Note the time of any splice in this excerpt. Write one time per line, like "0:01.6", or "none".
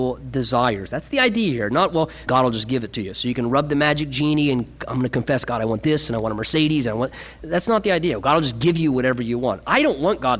0:02.3